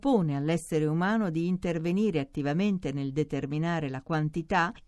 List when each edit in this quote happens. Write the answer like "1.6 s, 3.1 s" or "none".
none

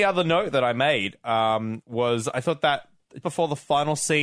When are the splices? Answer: 3.2 s

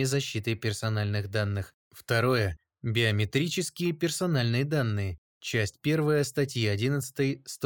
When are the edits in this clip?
1.8 s

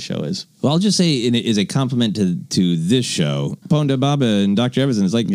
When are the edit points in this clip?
3.6 s

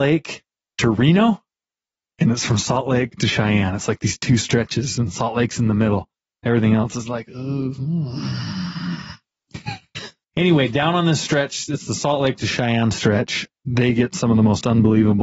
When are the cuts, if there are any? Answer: none

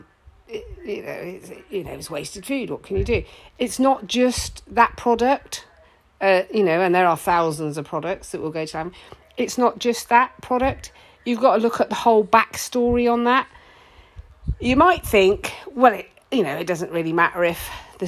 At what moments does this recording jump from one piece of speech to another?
14.5 s

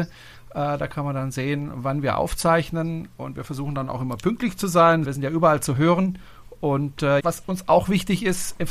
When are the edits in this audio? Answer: 5.0 s, 7.2 s

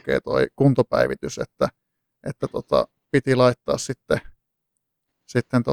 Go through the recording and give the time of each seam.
none

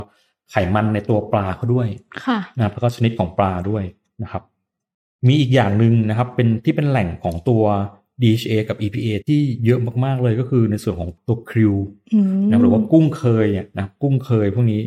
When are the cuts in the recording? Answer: none

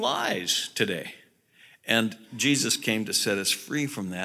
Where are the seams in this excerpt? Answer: none

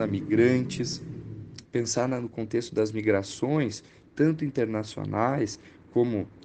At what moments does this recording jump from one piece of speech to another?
1.6 s

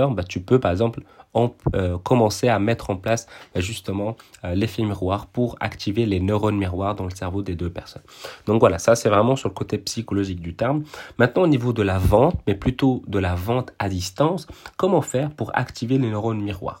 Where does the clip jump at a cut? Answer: none

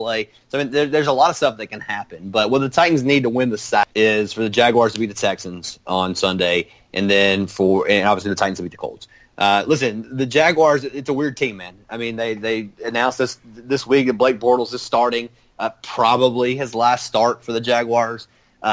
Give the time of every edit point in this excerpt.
none

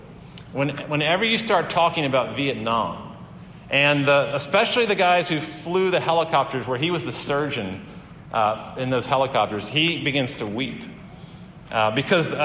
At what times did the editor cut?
none

